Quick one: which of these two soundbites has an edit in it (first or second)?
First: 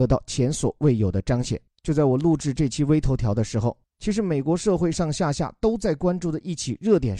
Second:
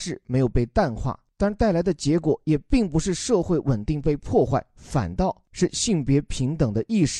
first